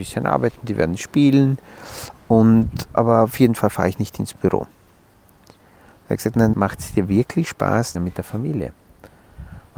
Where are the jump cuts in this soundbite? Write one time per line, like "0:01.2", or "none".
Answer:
0:02.9
0:06.5
0:07.9